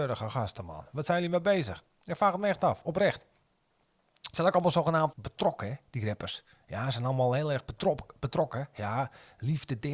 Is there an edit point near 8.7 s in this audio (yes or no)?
no